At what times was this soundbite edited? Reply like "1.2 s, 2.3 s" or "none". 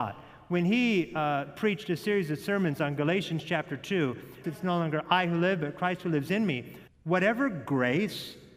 4.4 s, 6.9 s